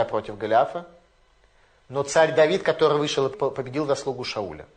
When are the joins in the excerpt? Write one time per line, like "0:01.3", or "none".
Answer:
0:03.3